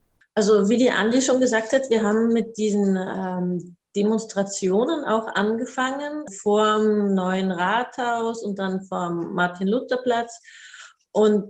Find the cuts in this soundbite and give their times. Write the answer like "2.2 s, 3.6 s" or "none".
6.3 s

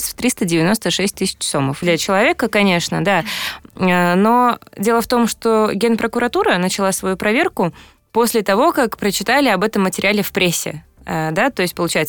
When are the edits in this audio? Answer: 1.8 s

